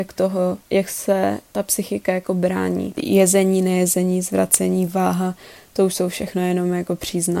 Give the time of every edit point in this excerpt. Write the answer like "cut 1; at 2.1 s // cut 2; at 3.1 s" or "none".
cut 1; at 2.9 s